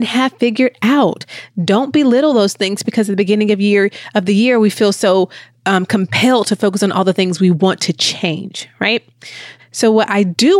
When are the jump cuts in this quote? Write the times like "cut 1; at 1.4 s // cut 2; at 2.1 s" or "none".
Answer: cut 1; at 9.6 s